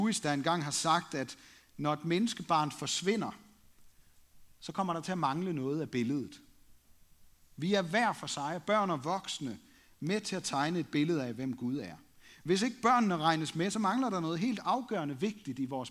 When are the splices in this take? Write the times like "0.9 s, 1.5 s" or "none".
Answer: none